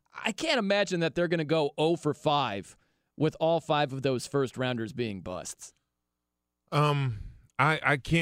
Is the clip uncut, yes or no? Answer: yes